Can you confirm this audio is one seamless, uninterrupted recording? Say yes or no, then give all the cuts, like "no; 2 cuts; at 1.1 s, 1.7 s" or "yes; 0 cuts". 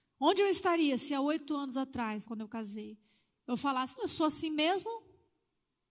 no; 2 cuts; at 2.2 s, 4.0 s